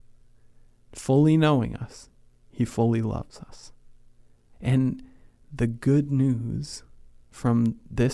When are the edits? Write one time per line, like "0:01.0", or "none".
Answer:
0:04.5